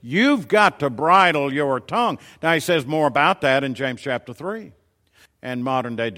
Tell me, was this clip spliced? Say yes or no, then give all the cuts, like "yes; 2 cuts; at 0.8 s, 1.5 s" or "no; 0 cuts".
yes; 1 cut; at 5.3 s